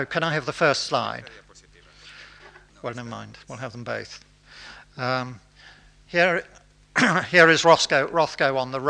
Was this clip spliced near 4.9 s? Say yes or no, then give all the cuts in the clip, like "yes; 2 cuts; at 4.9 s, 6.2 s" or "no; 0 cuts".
no; 1 cut; at 2.7 s